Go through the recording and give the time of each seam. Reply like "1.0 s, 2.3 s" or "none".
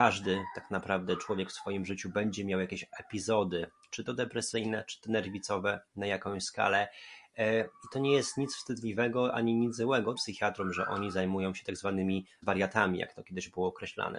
10.2 s, 12.4 s